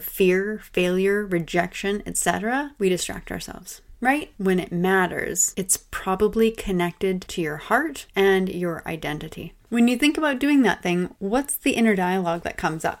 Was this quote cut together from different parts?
yes; 2 cuts; at 4.3 s, 9.6 s

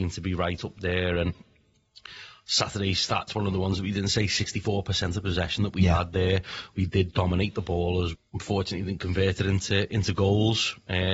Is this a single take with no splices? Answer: no; 1 cut; at 8.1 s

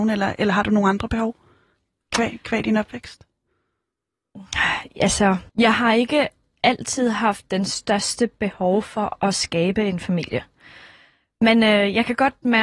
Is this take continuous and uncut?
no; 1 cut; at 5.5 s

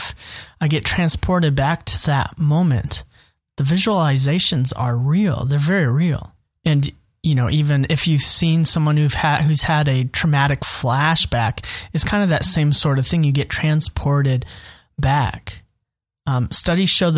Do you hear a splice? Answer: no; 0 cuts

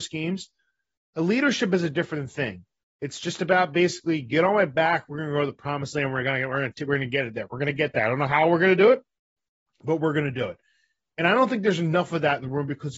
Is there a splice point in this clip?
no; 0 cuts

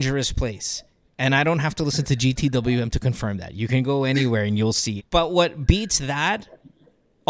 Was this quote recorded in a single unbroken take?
no; 1 cut; at 5.0 s

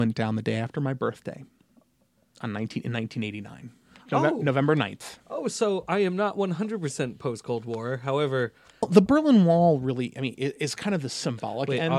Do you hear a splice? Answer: yes; 1 cut; at 8.8 s

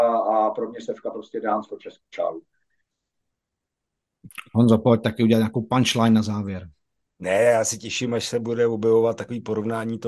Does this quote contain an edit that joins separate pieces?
no; 0 cuts

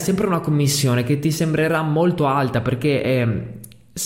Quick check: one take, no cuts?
yes; 0 cuts

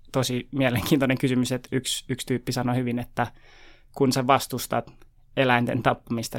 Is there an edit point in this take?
yes; 1 cut; at 1.7 s

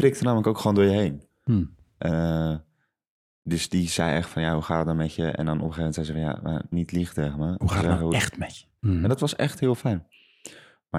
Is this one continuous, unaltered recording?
no; 2 cuts; at 6.7 s, 8.8 s

